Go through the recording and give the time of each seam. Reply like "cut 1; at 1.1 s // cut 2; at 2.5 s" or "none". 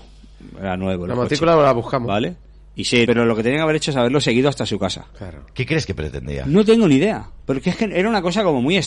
cut 1; at 3.1 s